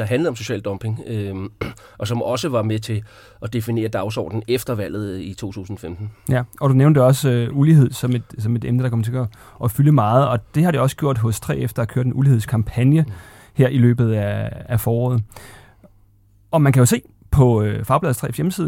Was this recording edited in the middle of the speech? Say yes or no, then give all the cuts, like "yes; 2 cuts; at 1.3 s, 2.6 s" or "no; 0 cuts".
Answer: no; 0 cuts